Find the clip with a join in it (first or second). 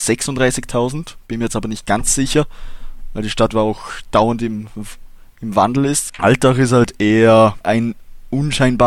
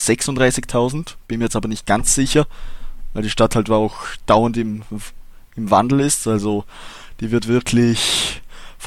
first